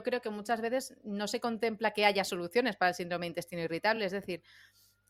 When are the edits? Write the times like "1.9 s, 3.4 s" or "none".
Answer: none